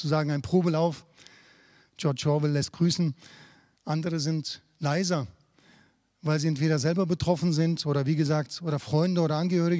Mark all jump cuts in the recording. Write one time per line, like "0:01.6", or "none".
0:03.8